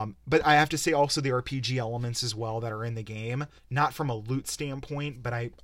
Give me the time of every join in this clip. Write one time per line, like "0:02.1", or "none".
0:03.6